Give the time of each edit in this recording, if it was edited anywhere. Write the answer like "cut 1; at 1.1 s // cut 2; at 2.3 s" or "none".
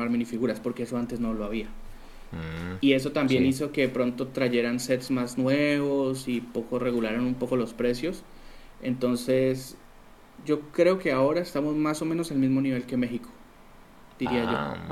none